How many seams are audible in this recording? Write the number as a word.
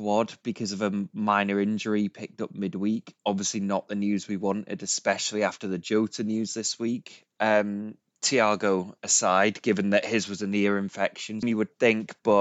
two